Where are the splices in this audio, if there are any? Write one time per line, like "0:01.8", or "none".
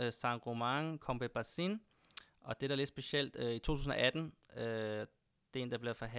none